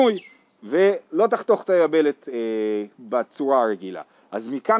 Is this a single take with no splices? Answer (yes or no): no